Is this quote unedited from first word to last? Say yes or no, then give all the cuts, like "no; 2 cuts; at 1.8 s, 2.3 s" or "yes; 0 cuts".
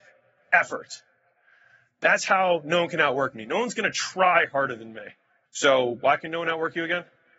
no; 1 cut; at 5.4 s